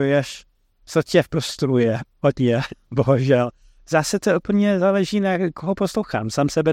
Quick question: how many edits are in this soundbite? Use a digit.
1